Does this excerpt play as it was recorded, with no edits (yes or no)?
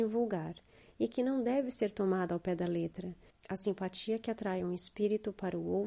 no